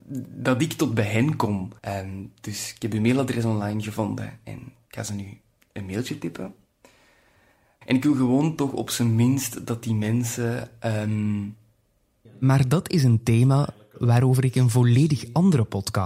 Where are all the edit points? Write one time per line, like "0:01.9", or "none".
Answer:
0:01.8
0:07.8
0:12.2